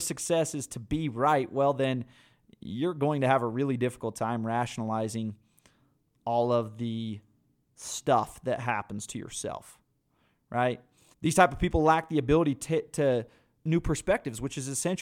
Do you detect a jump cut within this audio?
yes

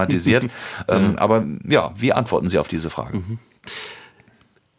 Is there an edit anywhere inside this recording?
no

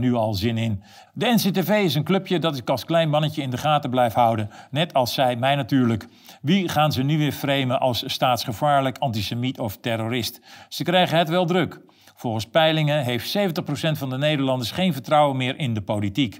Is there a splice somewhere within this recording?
yes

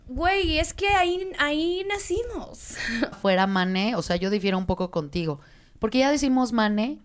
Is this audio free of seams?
no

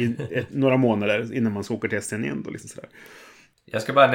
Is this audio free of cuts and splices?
yes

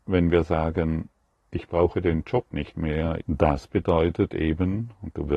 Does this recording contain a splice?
yes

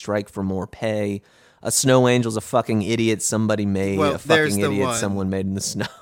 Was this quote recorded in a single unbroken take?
yes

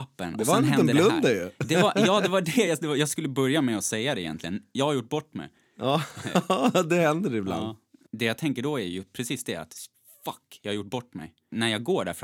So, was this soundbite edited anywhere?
no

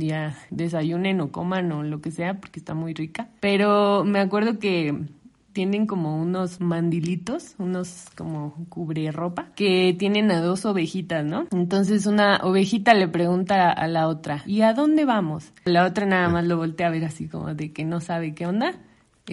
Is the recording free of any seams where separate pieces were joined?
yes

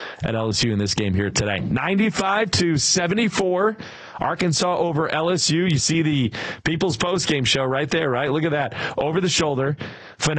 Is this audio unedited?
yes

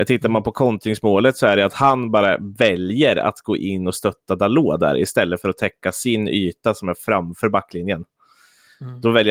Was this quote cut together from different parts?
no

